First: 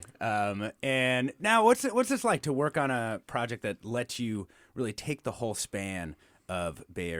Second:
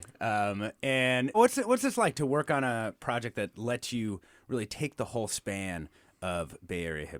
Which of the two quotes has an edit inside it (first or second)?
second